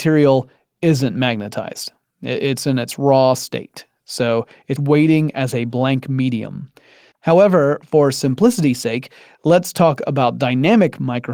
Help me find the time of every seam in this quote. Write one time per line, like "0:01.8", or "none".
0:04.8
0:07.1